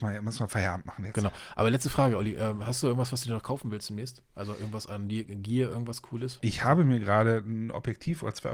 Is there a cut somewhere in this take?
no; 0 cuts

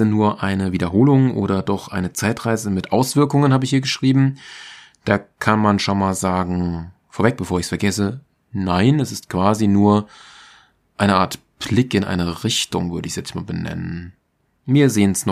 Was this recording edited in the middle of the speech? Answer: no; 0 cuts

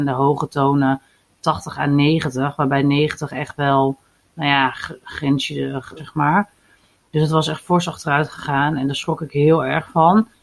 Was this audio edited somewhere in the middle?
yes; 1 cut; at 6.0 s

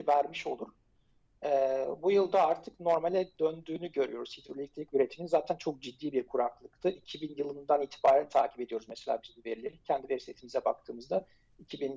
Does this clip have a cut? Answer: no; 0 cuts

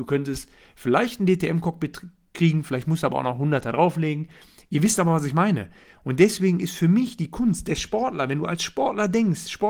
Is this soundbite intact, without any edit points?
yes; 0 cuts

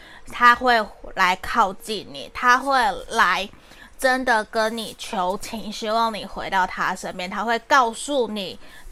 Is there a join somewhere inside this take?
no; 0 cuts

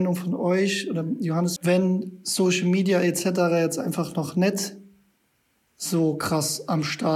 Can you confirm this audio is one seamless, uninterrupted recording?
no; 1 cut; at 1.6 s

